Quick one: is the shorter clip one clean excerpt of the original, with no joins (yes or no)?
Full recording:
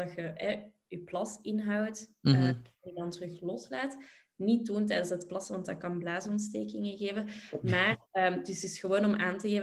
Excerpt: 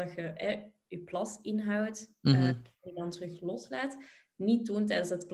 yes